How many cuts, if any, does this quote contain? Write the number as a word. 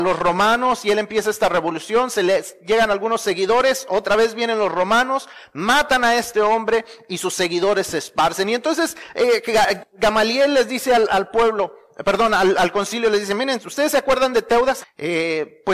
one